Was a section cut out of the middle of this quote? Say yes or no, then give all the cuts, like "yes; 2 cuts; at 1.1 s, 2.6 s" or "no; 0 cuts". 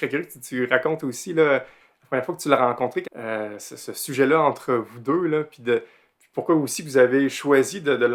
yes; 1 cut; at 3.0 s